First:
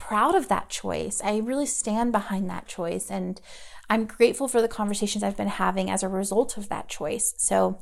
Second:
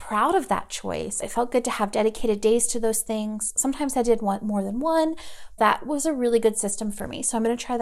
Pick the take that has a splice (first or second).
second